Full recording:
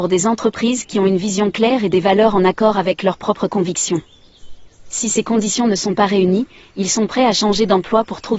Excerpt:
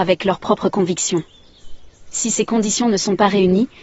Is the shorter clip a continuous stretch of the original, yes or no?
yes